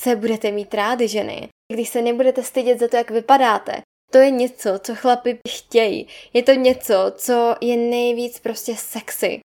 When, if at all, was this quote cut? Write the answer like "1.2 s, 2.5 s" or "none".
none